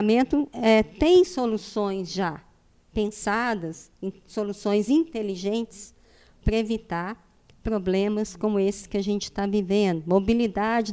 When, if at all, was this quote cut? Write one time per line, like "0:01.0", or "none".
none